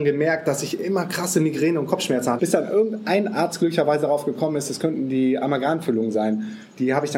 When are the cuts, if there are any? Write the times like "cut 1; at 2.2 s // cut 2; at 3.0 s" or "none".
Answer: cut 1; at 2.4 s

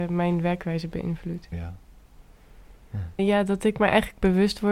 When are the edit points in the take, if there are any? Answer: cut 1; at 1.5 s // cut 2; at 3.2 s

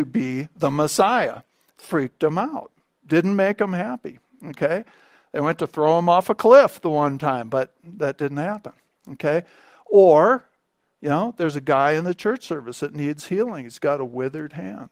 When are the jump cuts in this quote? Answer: none

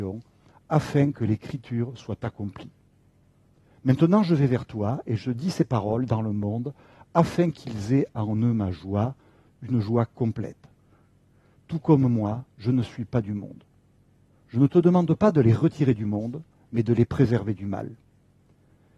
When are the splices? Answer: cut 1; at 11.5 s

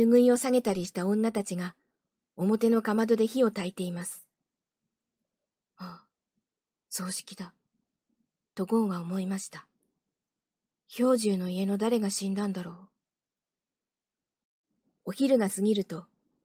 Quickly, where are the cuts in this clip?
cut 1; at 5.6 s

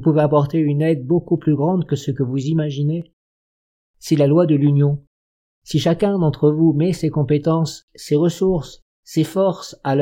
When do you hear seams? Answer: none

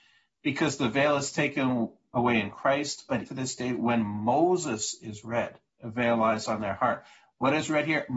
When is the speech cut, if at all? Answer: cut 1; at 3.3 s // cut 2; at 5.7 s

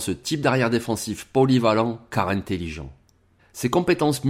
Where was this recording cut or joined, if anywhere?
cut 1; at 3.4 s

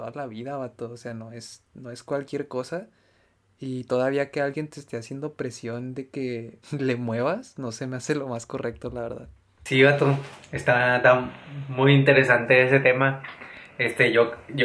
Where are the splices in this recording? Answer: cut 1; at 6.6 s

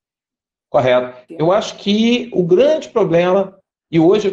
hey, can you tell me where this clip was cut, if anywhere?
cut 1; at 1.3 s

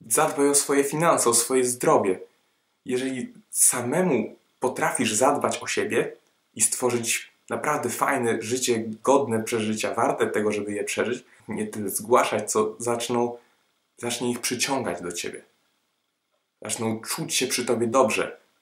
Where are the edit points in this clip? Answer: cut 1; at 11.4 s

